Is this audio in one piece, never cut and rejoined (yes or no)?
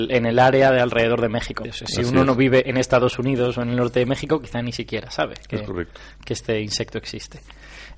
no